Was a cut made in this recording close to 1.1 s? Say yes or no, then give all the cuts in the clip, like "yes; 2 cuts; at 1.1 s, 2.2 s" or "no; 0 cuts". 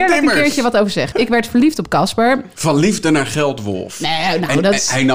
yes; 2 cuts; at 1.1 s, 2.5 s